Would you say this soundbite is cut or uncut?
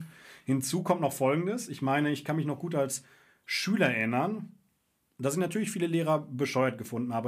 uncut